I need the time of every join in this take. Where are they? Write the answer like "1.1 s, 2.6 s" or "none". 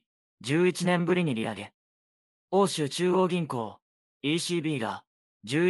none